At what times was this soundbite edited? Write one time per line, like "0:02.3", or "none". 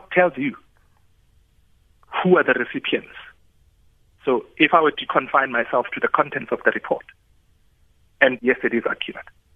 0:05.1
0:08.4